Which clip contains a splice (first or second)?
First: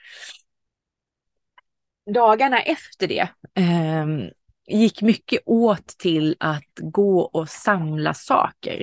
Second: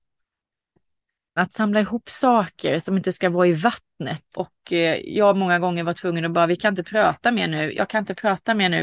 second